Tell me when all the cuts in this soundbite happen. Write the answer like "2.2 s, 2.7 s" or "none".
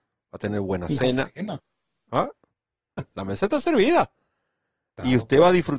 3.0 s